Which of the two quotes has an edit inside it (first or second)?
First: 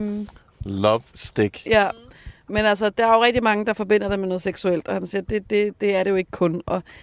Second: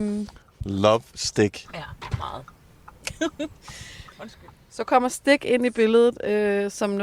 second